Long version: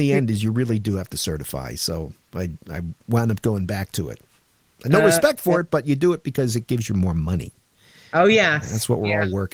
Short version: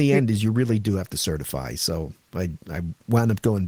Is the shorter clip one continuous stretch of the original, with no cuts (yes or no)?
yes